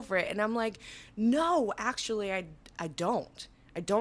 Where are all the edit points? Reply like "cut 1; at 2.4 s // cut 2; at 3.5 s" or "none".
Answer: cut 1; at 2.7 s